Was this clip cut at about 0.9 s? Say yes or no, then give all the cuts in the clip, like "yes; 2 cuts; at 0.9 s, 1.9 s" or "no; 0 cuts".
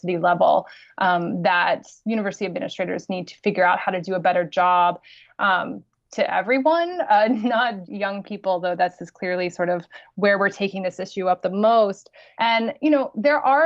no; 3 cuts; at 5.2 s, 7.8 s, 12.3 s